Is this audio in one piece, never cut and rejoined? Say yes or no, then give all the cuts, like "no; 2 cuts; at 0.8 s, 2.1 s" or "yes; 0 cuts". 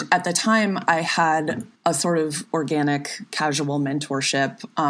no; 1 cut; at 1.8 s